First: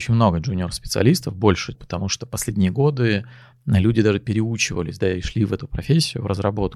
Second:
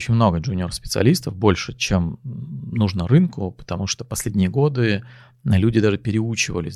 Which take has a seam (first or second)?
first